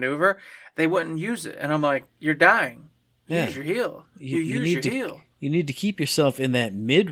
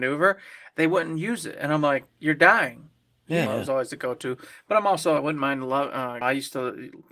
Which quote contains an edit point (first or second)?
second